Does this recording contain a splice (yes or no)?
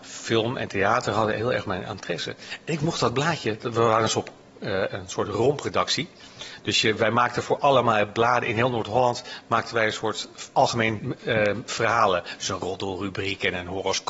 yes